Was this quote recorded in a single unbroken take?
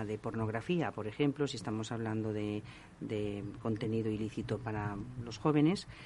yes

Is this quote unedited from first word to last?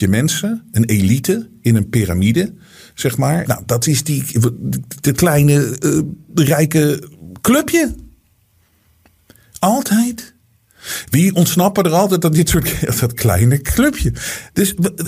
no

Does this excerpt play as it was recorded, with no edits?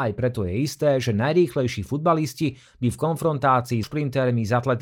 no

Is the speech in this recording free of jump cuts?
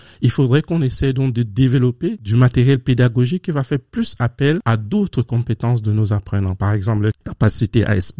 yes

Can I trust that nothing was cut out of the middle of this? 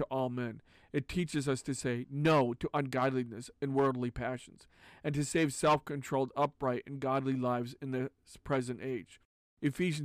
yes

